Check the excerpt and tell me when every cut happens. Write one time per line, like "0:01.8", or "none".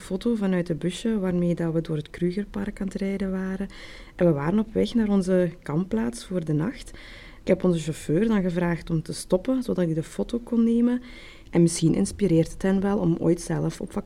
0:07.4
0:11.4